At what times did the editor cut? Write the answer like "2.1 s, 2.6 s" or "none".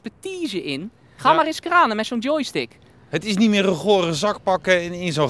1.2 s, 3.1 s

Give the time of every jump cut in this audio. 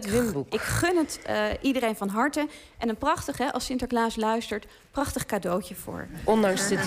none

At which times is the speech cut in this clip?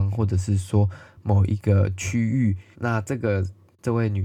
2.7 s

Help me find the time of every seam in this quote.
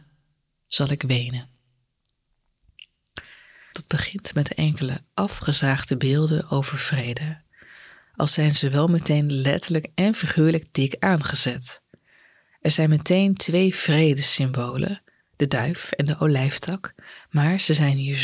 3.7 s

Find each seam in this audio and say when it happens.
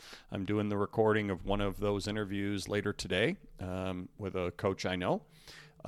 none

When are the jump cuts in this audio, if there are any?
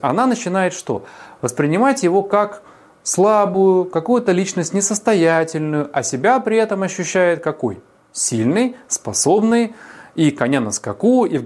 none

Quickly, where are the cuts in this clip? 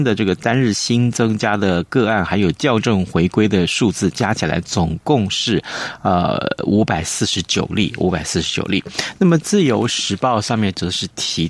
none

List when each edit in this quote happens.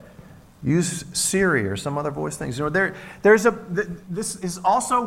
4.0 s

